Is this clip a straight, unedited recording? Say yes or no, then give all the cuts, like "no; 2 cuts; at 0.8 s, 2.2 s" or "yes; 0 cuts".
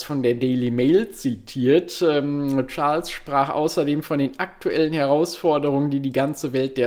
yes; 0 cuts